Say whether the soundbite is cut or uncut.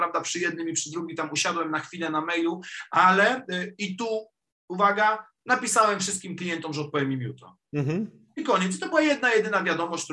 uncut